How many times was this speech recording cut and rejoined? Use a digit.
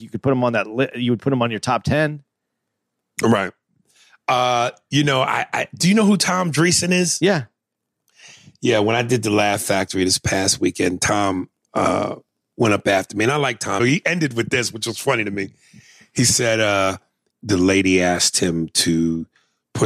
2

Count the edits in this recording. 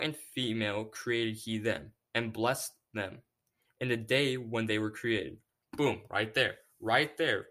2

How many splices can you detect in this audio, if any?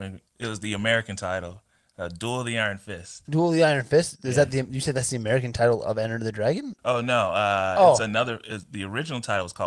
0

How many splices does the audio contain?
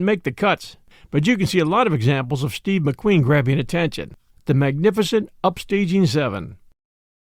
1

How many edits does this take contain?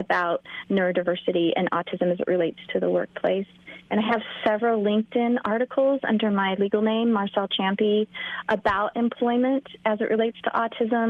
0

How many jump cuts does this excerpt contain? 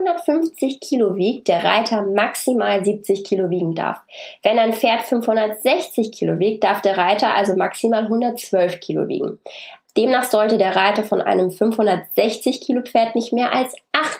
1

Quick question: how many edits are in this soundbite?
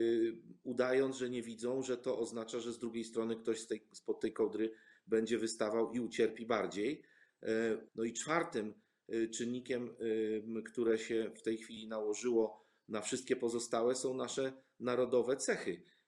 1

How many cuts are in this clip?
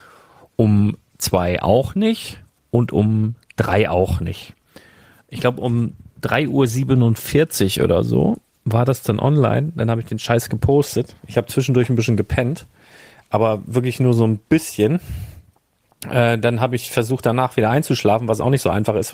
0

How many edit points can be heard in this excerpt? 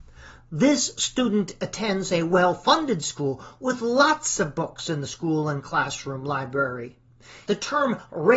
1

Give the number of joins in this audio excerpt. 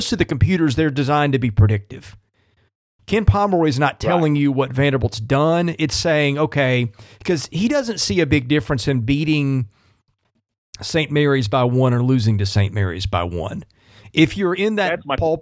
0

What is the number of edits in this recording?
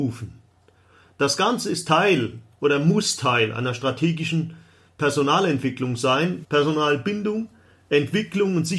1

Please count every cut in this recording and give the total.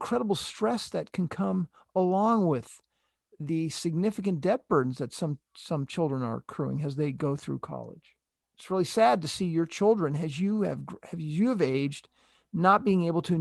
1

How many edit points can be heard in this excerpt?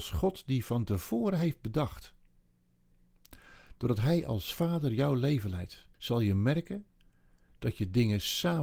1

